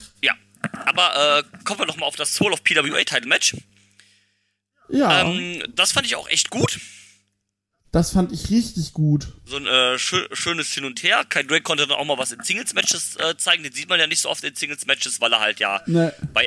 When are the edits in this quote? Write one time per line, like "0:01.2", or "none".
none